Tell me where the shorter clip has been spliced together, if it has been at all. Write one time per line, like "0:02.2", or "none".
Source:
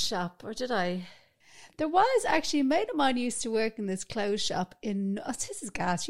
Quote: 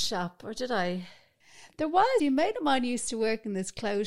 0:02.2